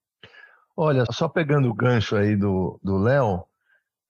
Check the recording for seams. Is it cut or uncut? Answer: cut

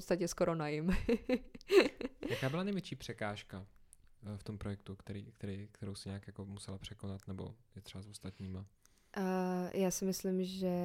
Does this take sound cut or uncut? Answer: uncut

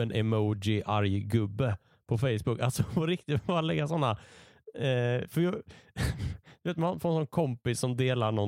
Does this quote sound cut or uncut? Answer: uncut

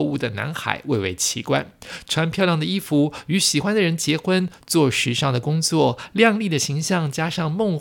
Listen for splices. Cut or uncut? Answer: uncut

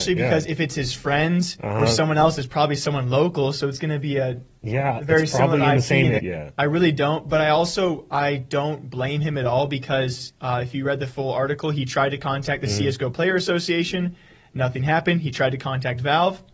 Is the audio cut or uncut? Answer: cut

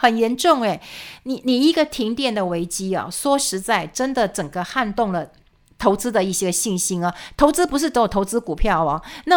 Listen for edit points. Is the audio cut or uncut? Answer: uncut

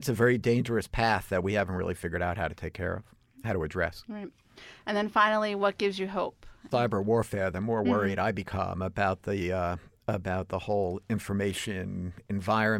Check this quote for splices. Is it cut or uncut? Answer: cut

